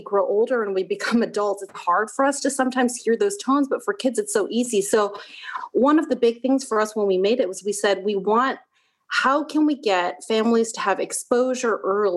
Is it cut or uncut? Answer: cut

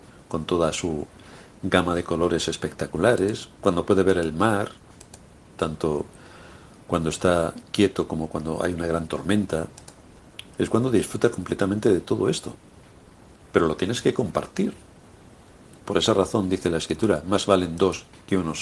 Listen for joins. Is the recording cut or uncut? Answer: uncut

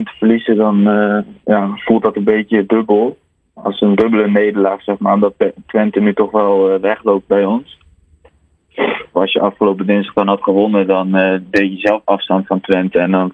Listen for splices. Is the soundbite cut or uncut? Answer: cut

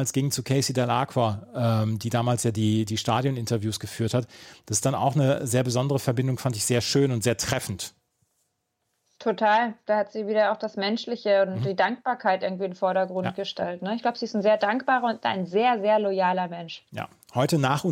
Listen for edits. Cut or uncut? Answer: uncut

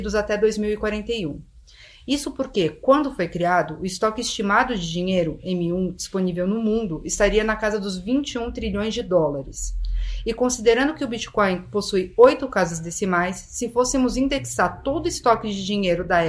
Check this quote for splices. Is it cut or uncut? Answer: uncut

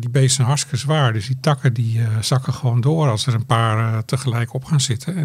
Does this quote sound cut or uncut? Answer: uncut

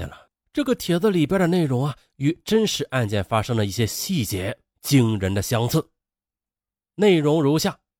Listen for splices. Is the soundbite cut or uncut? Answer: uncut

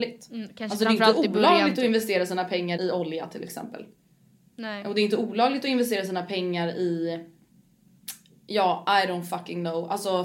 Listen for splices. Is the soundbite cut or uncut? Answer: cut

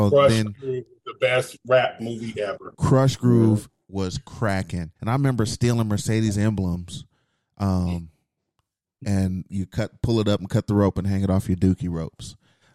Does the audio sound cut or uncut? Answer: cut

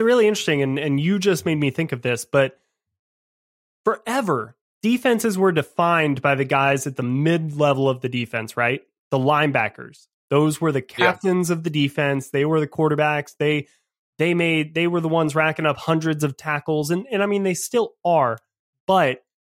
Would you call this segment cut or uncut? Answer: uncut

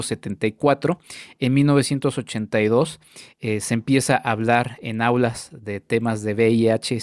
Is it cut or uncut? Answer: uncut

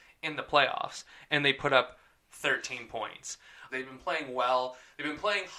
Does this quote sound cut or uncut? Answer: cut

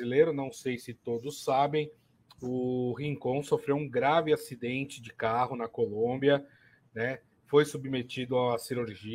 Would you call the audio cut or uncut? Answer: uncut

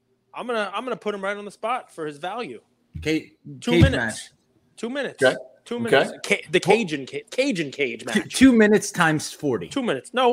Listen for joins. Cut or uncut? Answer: uncut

